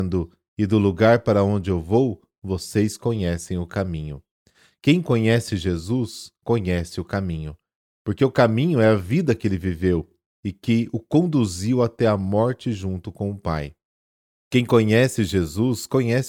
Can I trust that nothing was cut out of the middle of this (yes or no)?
yes